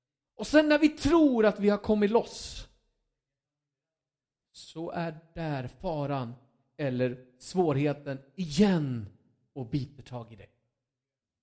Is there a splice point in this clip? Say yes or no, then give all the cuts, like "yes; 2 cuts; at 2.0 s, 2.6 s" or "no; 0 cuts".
no; 0 cuts